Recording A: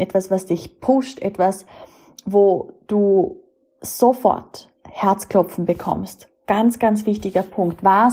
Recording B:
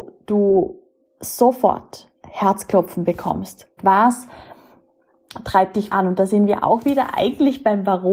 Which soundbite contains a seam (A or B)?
B